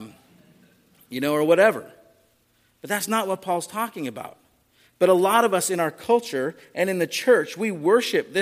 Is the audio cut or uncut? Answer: uncut